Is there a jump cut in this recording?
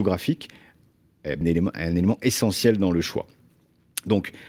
yes; 1 cut; at 1.4 s

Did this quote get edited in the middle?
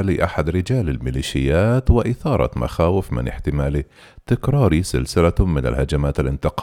no; 0 cuts

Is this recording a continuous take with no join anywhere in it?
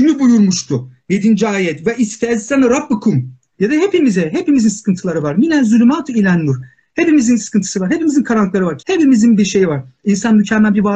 no; 2 cuts; at 3.5 s, 8.8 s

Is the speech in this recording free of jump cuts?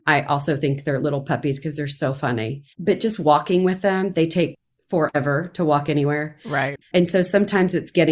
no; 2 cuts; at 2.7 s, 6.8 s

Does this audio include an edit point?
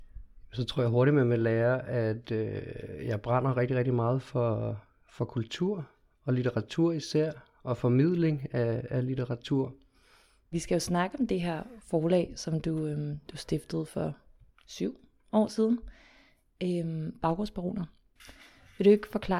no; 0 cuts

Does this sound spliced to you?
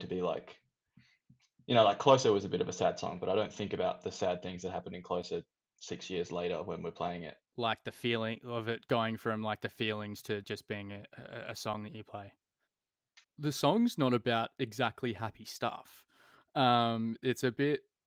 yes; 3 cuts; at 7.5 s, 10.4 s, 13.2 s

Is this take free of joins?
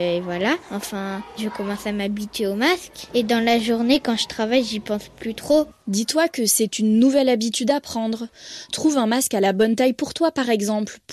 yes; 0 cuts

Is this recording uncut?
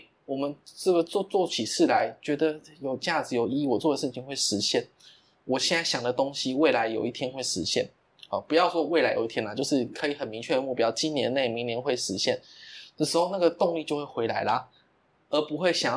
yes; 0 cuts

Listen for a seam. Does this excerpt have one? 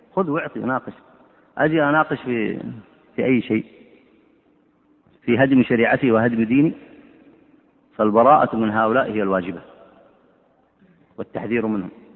no; 0 cuts

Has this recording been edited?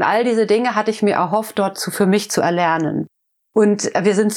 no; 0 cuts

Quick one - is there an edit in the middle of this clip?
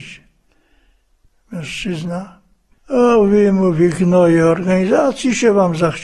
no; 0 cuts

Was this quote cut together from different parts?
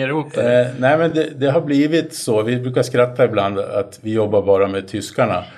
no; 0 cuts

